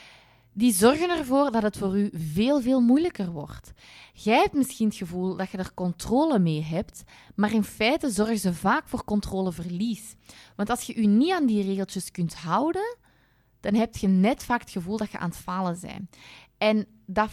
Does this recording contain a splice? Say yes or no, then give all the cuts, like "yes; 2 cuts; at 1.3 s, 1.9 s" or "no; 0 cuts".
no; 0 cuts